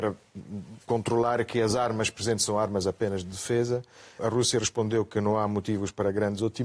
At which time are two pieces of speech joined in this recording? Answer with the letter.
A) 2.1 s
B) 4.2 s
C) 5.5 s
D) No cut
B